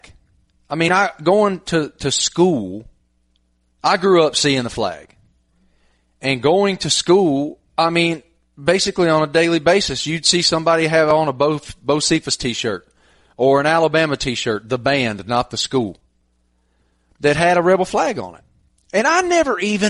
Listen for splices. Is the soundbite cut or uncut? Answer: uncut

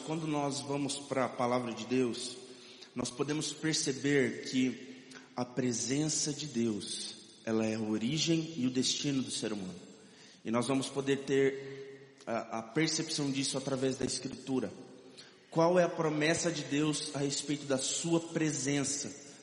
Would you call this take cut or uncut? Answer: uncut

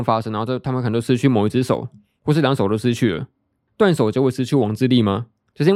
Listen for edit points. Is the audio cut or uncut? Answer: cut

